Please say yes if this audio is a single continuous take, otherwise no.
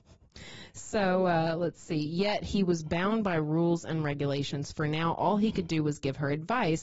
yes